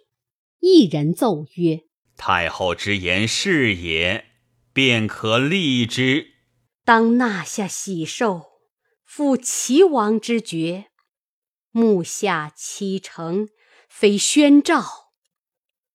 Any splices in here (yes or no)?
yes